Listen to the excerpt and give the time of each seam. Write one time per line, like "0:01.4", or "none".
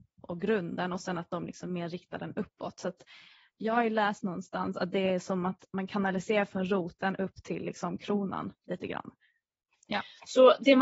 0:09.7